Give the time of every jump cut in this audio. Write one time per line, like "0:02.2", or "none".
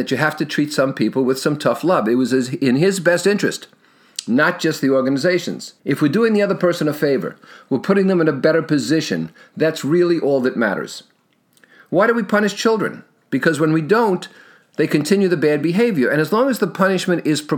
0:05.8